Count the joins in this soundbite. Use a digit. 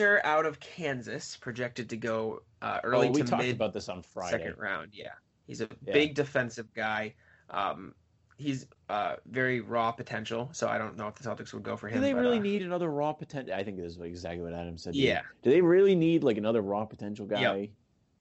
0